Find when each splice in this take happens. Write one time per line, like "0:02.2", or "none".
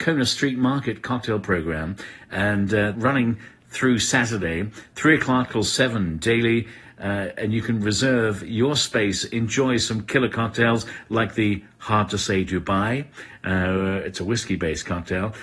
0:02.9